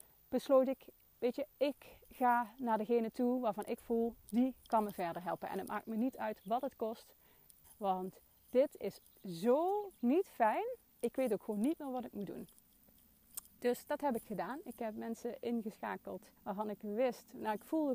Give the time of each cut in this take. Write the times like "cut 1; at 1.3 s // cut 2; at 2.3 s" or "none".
cut 1; at 7.6 s // cut 2; at 16.4 s